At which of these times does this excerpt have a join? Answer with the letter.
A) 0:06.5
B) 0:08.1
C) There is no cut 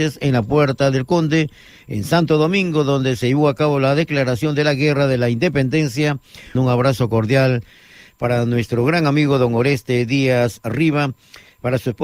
A